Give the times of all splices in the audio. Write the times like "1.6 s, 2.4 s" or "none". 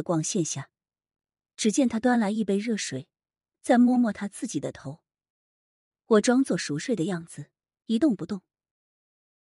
3.5 s, 5.3 s